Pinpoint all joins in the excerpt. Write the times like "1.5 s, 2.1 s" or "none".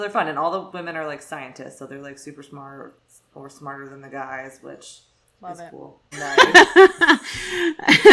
6.1 s